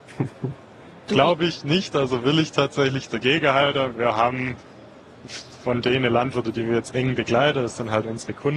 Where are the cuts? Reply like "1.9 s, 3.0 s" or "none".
none